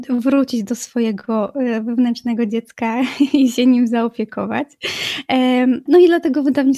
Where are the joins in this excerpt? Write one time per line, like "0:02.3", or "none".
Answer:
0:05.9